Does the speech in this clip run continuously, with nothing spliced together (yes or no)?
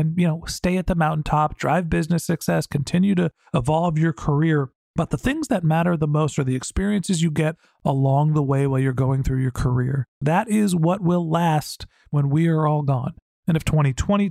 no